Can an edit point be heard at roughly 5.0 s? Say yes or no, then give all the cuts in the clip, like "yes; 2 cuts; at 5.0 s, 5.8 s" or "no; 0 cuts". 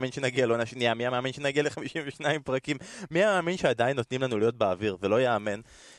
no; 0 cuts